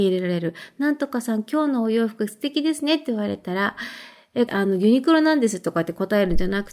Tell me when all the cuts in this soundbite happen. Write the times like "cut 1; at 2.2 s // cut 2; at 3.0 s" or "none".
cut 1; at 4.5 s